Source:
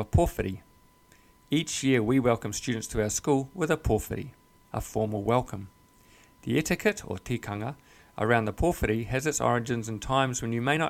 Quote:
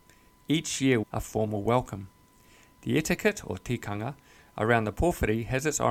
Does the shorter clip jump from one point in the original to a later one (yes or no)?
yes